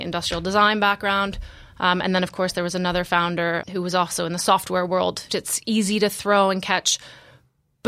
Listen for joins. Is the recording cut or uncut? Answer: cut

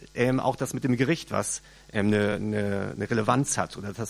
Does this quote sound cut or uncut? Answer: uncut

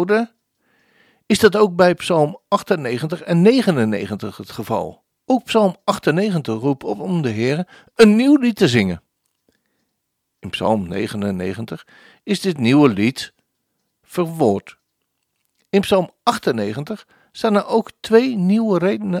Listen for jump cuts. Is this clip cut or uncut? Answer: uncut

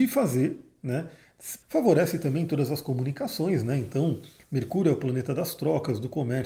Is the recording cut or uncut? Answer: cut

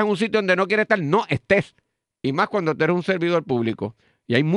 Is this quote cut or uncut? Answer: uncut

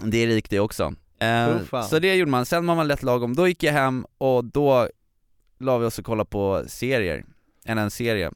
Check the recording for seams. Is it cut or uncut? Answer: uncut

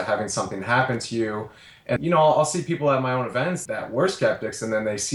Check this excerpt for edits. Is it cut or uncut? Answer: cut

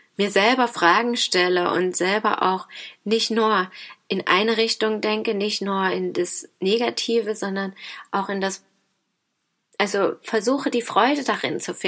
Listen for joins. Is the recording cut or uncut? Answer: uncut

